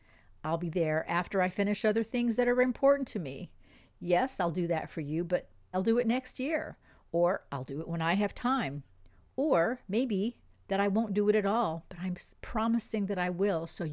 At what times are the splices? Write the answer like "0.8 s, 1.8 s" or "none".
5.7 s